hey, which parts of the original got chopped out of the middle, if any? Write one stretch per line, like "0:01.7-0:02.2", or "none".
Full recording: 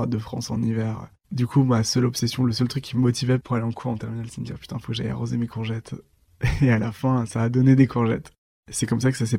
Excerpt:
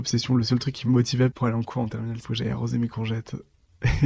0:04.3-0:04.8